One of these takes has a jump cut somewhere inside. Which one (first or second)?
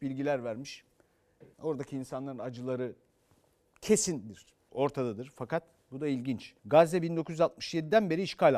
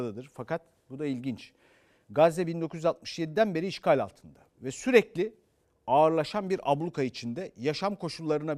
first